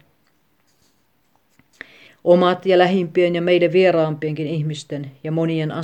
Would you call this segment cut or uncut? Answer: cut